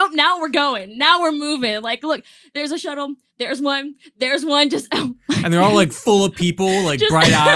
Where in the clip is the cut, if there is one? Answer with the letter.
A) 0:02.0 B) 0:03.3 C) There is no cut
C